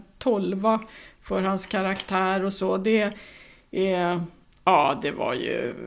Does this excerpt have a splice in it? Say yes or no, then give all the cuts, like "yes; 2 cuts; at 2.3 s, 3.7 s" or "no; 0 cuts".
no; 0 cuts